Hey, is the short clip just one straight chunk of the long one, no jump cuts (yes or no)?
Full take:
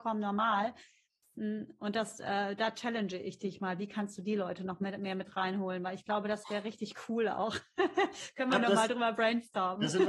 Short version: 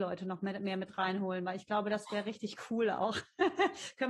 yes